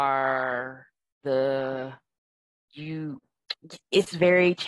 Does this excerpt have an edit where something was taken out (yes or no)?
no